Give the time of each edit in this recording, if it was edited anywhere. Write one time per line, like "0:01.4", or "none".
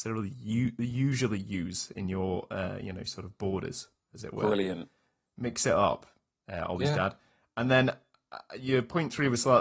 none